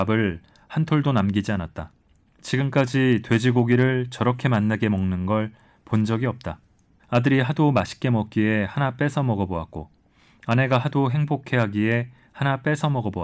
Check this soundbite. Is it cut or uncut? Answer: cut